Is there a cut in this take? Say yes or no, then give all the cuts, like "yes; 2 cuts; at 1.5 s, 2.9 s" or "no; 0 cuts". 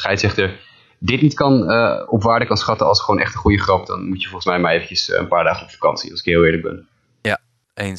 no; 0 cuts